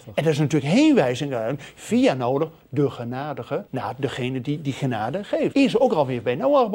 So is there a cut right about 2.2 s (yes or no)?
no